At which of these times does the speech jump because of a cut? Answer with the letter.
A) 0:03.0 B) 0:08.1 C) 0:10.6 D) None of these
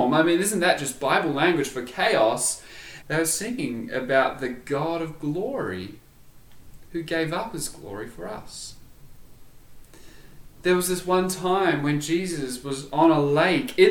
A